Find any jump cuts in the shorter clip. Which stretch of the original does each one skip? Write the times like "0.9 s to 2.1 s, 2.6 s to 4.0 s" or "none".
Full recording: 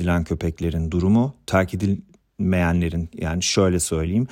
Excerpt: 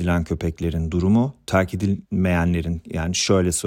2.1 s to 2.3 s